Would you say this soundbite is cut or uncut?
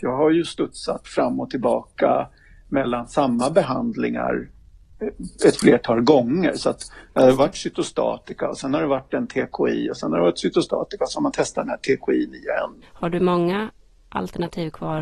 cut